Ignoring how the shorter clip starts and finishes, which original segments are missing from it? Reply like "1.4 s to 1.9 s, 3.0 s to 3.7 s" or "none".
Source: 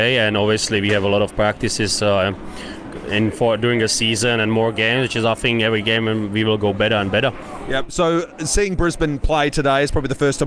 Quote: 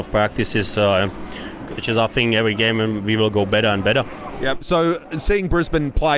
3.0 s to 5.0 s